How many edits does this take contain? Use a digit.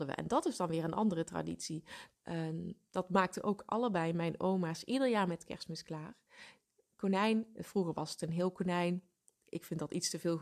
1